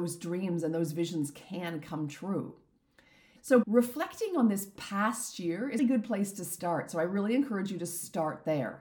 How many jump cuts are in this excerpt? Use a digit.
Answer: 2